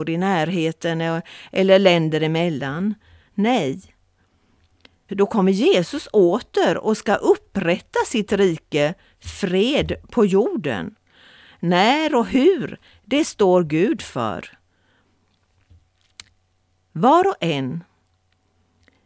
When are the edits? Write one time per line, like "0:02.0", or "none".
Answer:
0:05.1